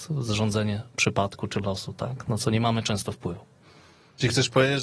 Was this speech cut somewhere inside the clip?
no; 0 cuts

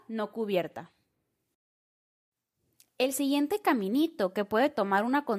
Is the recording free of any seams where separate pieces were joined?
yes; 0 cuts

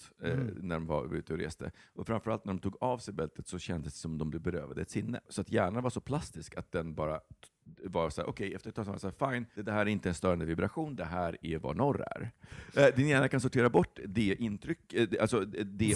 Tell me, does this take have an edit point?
yes; 2 cuts; at 9.5 s, 12.5 s

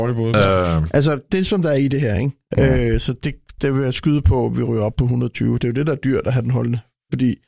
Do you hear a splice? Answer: yes; 2 cuts; at 2.5 s, 5.6 s

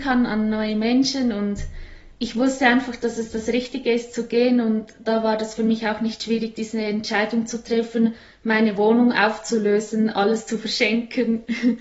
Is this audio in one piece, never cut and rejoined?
no; 1 cut; at 5.0 s

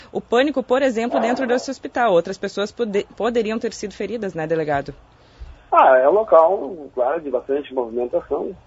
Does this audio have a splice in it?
no; 0 cuts

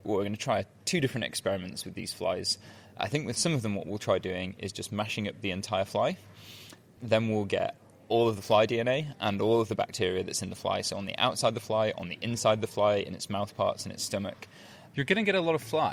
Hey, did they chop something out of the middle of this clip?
no; 0 cuts

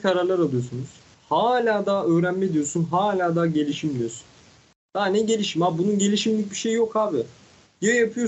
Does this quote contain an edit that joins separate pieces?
no; 0 cuts

